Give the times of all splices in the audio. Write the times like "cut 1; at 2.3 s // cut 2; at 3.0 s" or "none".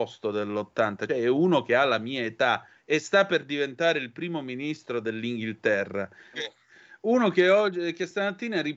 cut 1; at 1.1 s // cut 2; at 2.7 s // cut 3; at 6.3 s